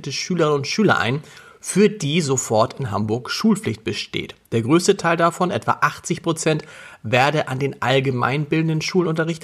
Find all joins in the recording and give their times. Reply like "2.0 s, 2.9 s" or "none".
none